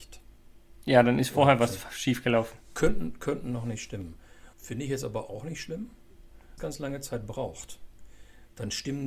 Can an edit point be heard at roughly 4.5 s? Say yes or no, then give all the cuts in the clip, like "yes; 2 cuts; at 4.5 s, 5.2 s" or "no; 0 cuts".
yes; 2 cuts; at 4.5 s, 6.6 s